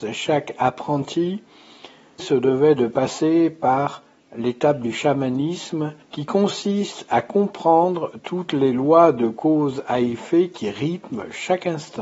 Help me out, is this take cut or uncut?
cut